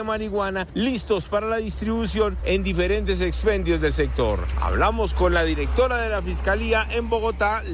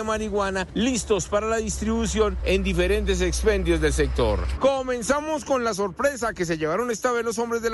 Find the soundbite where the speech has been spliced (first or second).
second